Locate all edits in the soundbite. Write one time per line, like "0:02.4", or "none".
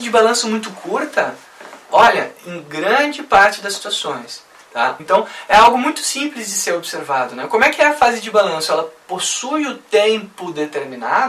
0:01.9
0:05.0